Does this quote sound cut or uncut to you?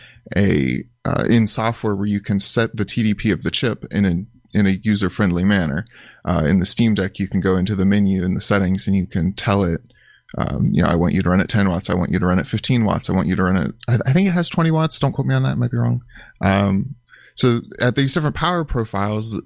uncut